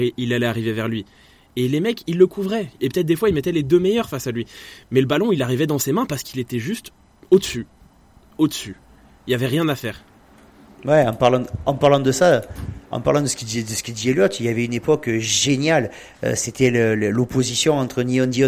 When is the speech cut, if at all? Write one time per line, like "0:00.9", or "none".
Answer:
0:02.8
0:11.6